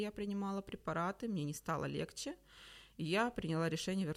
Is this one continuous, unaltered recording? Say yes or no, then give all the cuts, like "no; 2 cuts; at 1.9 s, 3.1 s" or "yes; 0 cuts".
yes; 0 cuts